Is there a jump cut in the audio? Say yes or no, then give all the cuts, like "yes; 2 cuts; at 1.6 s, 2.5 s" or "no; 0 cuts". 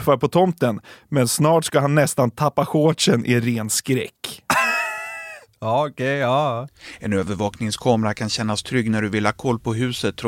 no; 0 cuts